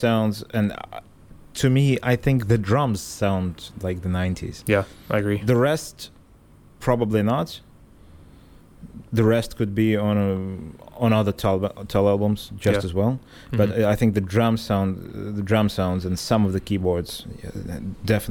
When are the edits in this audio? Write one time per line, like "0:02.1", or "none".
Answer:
none